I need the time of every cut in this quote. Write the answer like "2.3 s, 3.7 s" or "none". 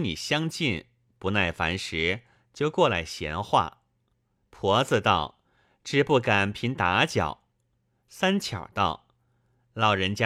6.5 s